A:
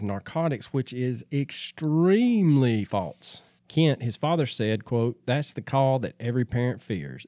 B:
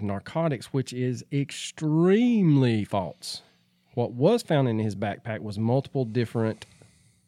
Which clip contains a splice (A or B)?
A